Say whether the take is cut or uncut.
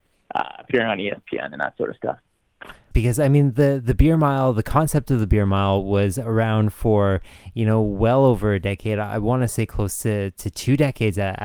cut